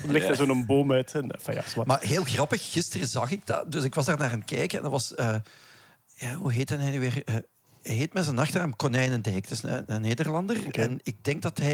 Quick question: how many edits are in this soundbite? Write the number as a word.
zero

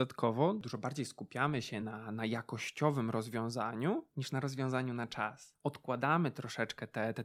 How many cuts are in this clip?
zero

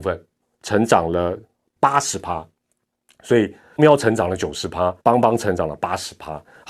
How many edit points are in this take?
two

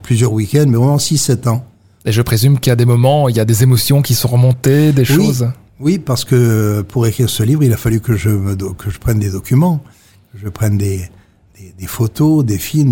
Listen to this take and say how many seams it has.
one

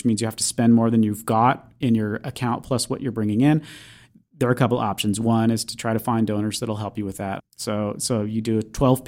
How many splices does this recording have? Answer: one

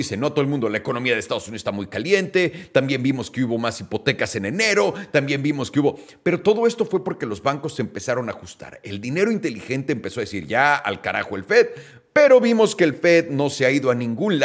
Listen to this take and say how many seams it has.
zero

